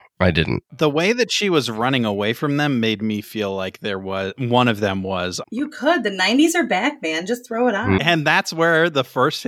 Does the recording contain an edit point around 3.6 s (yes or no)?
no